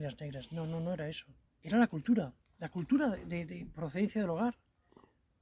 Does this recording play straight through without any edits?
no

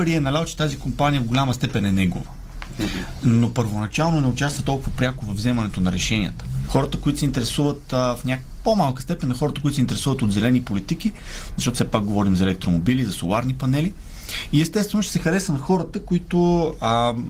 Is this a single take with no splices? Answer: no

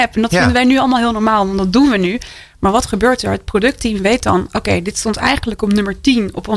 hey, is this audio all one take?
yes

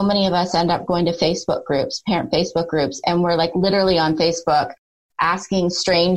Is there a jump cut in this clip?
no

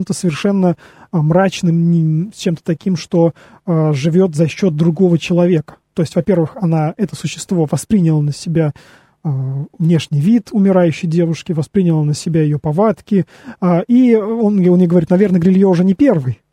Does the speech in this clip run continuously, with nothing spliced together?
yes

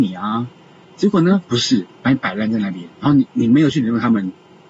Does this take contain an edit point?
yes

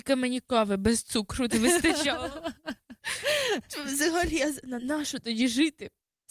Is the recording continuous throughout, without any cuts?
yes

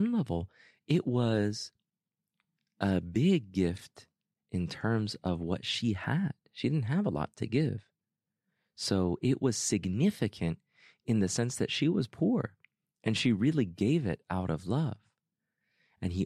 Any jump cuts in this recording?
no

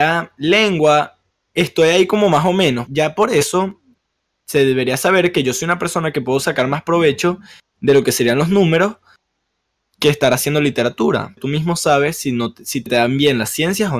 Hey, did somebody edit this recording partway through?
yes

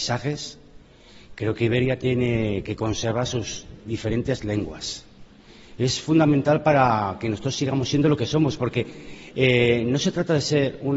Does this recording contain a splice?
no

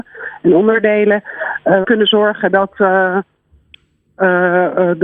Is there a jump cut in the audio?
yes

